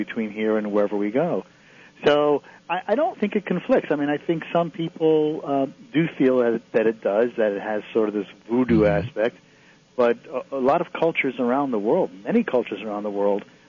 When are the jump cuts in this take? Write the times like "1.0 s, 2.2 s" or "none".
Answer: 3.1 s

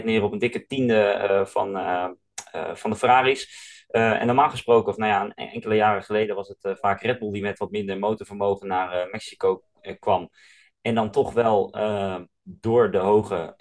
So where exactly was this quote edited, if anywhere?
none

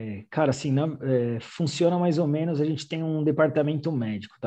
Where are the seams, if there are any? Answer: none

